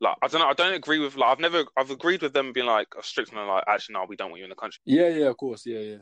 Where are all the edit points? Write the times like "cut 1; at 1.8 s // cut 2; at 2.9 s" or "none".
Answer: cut 1; at 4.8 s